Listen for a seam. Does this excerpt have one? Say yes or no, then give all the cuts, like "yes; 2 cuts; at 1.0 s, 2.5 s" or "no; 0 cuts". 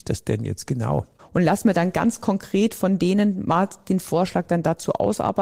yes; 1 cut; at 1.2 s